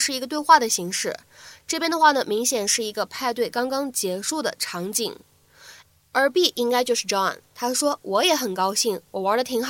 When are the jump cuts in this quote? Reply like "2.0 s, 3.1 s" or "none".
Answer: 5.8 s